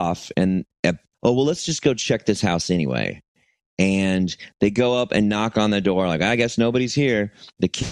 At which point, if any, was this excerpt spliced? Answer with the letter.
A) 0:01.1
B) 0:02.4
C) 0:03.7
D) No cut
A